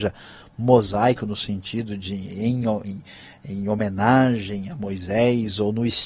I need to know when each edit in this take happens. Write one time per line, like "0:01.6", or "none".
0:02.8